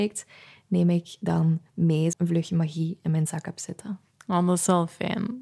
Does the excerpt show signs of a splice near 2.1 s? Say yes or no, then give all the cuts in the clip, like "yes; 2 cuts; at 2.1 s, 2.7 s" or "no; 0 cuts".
yes; 1 cut; at 2.1 s